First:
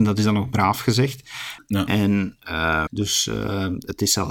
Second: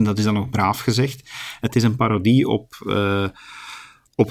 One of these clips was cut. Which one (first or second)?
first